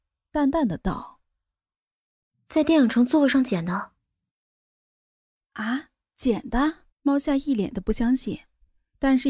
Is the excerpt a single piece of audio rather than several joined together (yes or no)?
no